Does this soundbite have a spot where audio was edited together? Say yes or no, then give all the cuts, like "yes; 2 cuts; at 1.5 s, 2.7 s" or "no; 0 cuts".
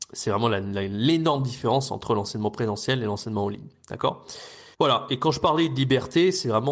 yes; 1 cut; at 4.7 s